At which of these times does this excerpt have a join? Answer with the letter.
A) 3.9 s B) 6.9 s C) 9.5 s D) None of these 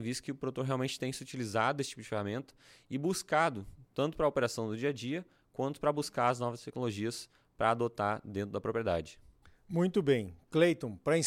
D